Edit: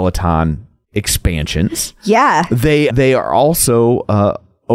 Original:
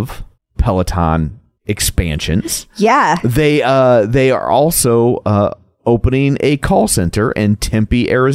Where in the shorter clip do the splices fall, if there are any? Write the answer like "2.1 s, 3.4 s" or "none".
2.9 s